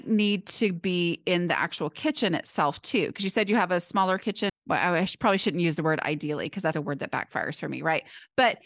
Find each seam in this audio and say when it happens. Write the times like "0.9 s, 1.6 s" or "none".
4.5 s, 6.7 s